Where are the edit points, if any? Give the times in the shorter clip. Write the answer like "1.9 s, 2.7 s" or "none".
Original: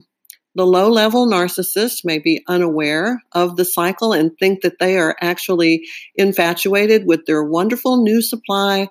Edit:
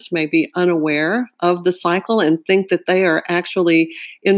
none